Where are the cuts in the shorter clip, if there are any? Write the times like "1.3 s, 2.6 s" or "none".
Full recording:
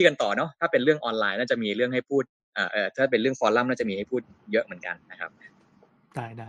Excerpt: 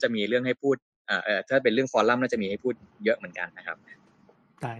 3.5 s